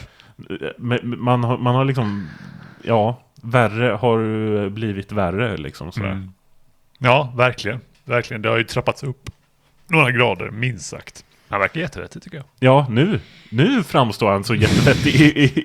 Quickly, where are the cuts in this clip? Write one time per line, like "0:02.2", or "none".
0:11.5